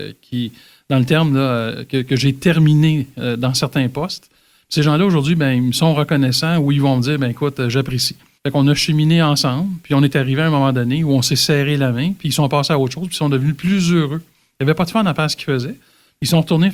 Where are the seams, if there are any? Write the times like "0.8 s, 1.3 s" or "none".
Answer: 8.4 s